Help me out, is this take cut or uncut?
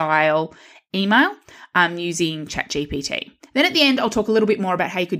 uncut